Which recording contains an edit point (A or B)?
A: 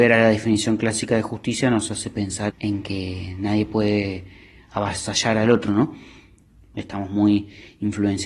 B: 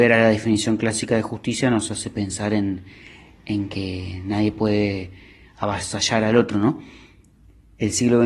A